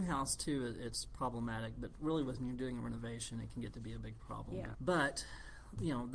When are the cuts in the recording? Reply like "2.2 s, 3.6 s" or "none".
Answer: 4.7 s